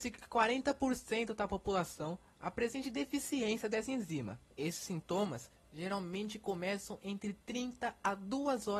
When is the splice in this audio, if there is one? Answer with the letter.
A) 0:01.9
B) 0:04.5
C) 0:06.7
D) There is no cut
B